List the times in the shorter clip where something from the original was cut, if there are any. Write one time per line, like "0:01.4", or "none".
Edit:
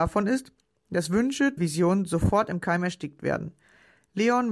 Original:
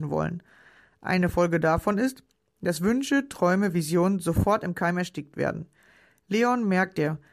0:01.6